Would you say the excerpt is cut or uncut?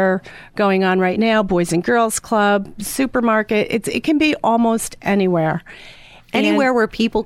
uncut